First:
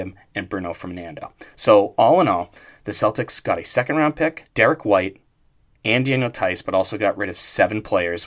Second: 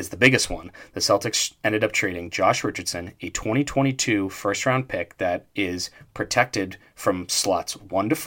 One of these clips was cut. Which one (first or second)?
first